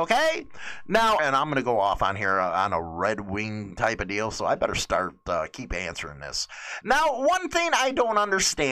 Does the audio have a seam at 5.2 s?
no; 2 cuts; at 1.2 s, 6.8 s

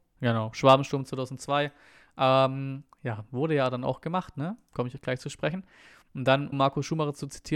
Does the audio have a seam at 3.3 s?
no; 1 cut; at 6.5 s

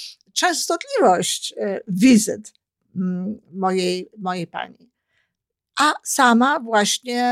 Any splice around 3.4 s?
no; 0 cuts

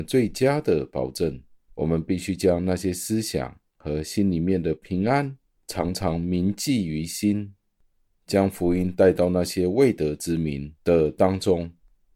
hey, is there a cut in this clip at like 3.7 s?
no; 0 cuts

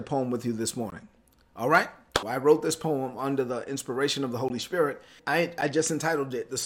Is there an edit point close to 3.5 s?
no; 2 cuts; at 2.2 s, 5.2 s

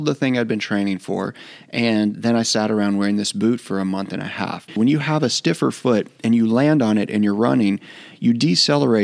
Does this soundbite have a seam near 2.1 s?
no; 1 cut; at 4.7 s

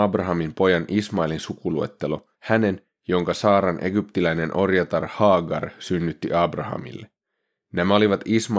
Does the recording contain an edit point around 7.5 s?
no; 1 cut; at 2.3 s

